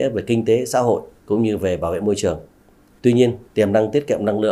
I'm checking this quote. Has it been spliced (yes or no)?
no